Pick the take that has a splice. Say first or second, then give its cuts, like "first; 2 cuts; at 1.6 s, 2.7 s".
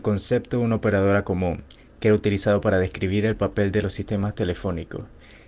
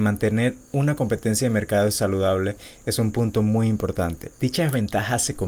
second; 1 cut; at 4.3 s